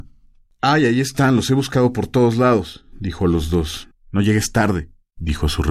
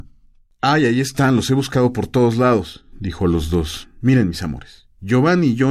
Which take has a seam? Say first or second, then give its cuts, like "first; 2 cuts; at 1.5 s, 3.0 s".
first; 1 cut; at 3.9 s